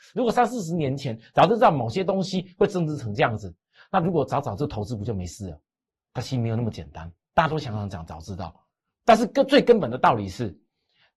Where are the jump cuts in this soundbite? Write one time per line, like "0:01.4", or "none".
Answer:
none